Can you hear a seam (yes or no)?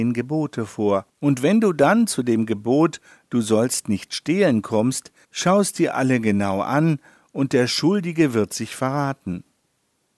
yes